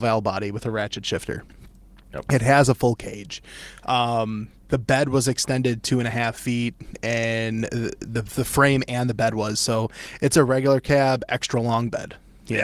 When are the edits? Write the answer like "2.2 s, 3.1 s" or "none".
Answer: none